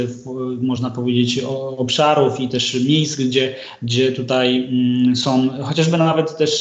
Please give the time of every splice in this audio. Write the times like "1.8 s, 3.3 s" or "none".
none